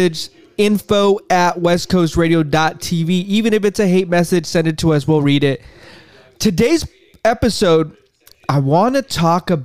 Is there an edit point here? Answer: no; 0 cuts

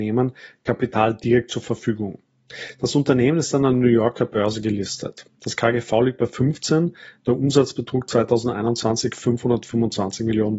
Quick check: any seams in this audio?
no; 0 cuts

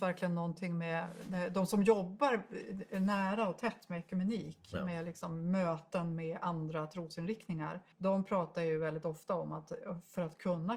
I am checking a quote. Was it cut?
yes; 1 cut; at 7.9 s

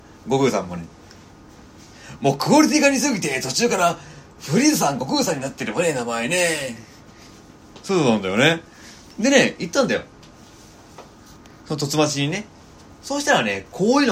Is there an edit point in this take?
no; 0 cuts

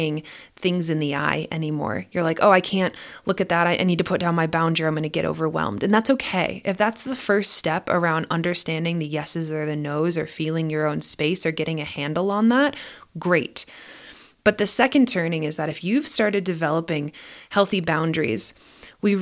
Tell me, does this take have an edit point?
no; 0 cuts

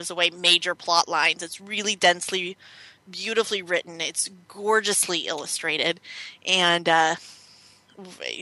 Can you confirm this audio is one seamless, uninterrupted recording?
yes; 0 cuts

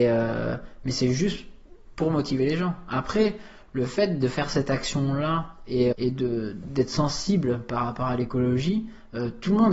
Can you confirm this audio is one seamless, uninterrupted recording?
no; 1 cut; at 5.9 s

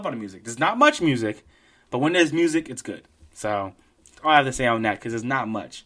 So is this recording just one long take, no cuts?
yes; 0 cuts

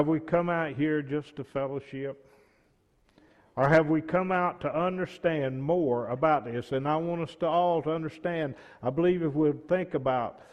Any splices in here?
no; 0 cuts

